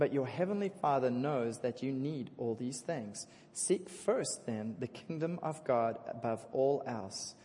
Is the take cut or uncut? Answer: uncut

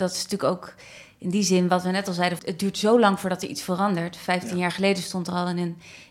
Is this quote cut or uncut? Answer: cut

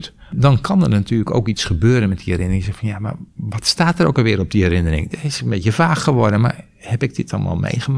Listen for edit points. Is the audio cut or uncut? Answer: uncut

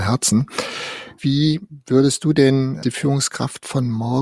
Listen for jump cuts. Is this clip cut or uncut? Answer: cut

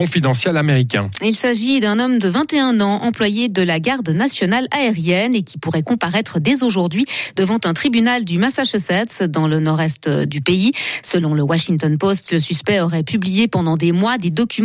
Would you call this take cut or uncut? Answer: uncut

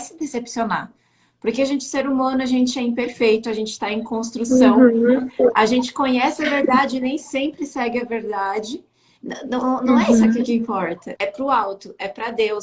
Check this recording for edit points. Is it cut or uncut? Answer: cut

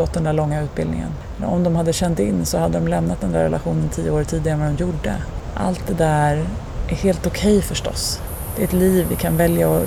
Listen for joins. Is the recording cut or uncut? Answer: uncut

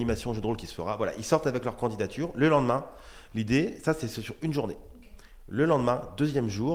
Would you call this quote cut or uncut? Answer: uncut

